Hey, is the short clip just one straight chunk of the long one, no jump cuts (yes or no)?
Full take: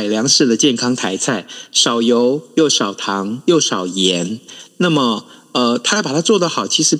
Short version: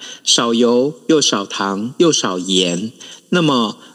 yes